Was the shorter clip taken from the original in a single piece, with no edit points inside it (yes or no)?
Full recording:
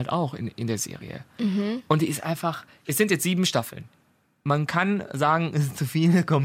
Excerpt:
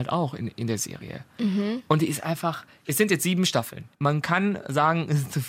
no